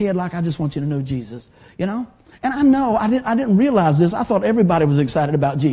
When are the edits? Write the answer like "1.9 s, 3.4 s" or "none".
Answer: none